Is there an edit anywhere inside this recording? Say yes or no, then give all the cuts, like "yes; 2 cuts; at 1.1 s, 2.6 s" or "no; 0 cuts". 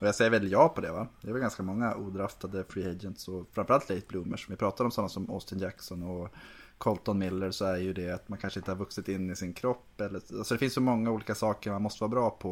no; 0 cuts